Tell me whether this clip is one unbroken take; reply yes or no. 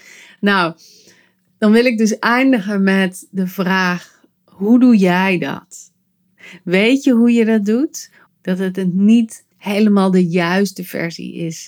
no